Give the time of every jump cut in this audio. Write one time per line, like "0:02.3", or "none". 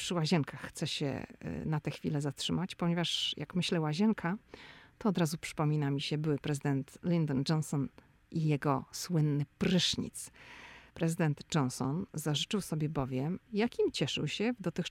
0:10.9
0:13.5